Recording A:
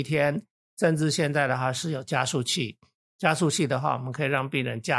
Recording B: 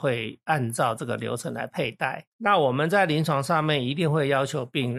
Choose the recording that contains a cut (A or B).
B